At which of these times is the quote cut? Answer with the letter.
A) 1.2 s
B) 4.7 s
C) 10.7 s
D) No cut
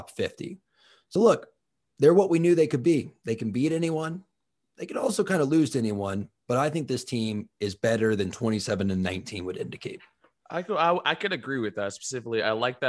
D